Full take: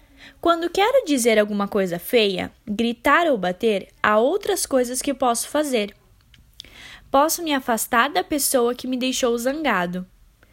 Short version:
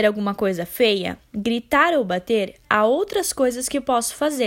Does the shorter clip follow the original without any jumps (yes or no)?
yes